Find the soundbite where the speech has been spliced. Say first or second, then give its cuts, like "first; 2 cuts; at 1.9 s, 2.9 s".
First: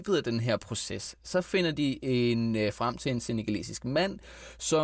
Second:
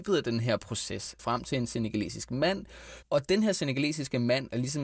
second; 2 cuts; at 1.2 s, 3.0 s